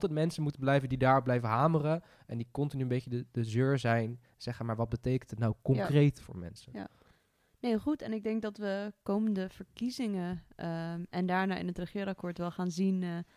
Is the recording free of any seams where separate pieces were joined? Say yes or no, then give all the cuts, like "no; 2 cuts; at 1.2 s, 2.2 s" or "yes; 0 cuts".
yes; 0 cuts